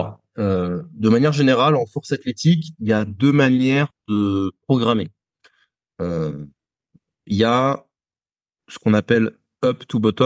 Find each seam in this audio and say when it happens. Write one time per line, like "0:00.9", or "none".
none